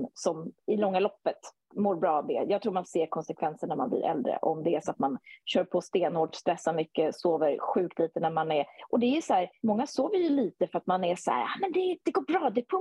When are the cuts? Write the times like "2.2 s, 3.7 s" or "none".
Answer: none

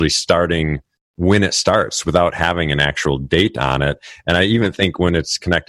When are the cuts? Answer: none

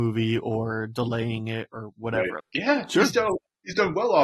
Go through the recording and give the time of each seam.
2.4 s

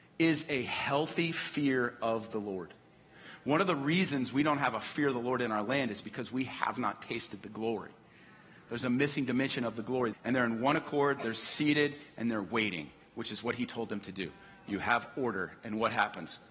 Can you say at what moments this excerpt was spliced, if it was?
10.1 s

